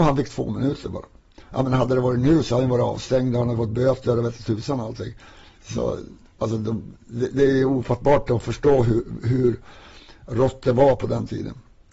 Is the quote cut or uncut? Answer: uncut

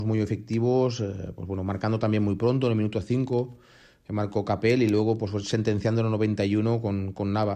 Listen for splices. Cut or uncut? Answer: uncut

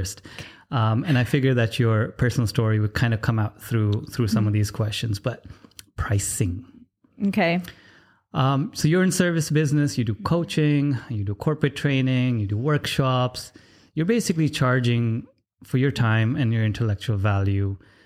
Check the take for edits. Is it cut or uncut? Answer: uncut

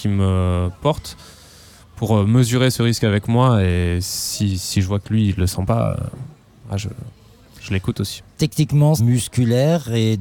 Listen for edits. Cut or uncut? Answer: cut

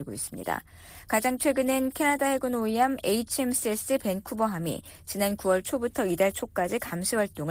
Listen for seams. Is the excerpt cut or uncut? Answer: uncut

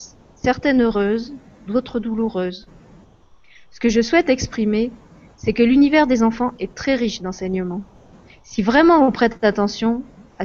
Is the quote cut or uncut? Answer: uncut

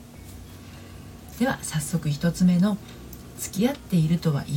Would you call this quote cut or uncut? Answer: cut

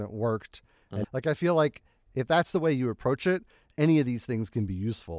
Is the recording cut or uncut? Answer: cut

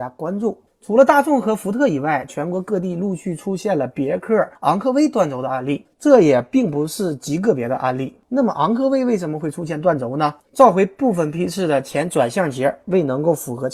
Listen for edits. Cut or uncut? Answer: cut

